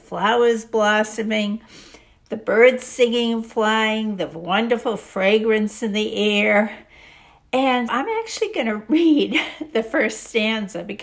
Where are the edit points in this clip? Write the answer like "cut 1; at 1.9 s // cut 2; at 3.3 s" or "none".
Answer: cut 1; at 7.9 s